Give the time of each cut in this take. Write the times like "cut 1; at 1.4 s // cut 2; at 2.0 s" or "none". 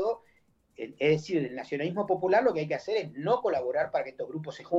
none